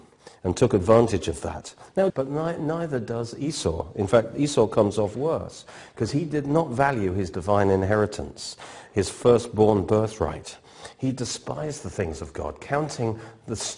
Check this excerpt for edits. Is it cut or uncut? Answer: cut